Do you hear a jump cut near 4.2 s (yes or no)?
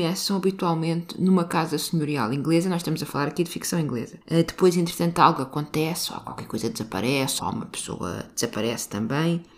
yes